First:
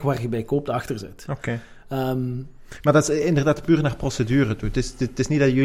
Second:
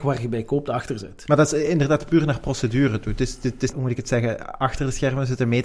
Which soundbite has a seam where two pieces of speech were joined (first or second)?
second